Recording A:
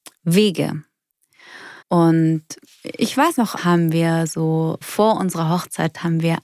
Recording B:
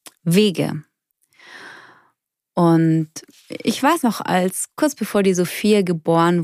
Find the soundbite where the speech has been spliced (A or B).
A